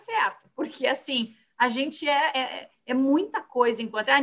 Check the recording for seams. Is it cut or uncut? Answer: uncut